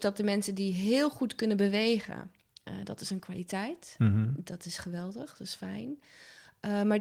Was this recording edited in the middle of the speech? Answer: no; 0 cuts

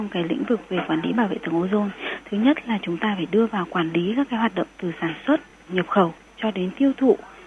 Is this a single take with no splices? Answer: no; 1 cut; at 5.7 s

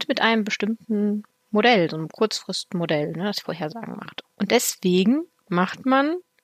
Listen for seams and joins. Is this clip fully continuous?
no; 1 cut; at 4.2 s

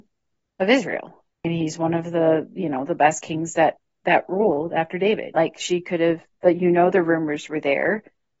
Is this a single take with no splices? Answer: no; 2 cuts; at 1.3 s, 5.3 s

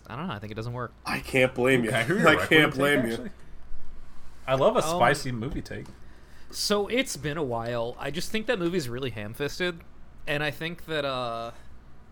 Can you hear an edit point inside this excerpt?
yes; 1 cut; at 0.9 s

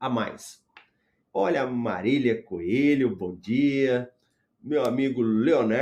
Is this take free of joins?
no; 1 cut; at 1.2 s

